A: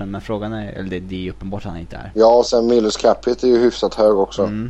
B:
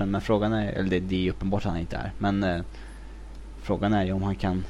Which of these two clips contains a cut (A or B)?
A